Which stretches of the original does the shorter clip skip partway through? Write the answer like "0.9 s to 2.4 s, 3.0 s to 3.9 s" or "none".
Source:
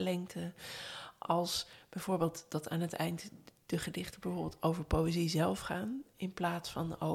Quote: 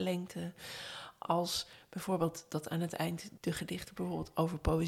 3.4 s to 3.6 s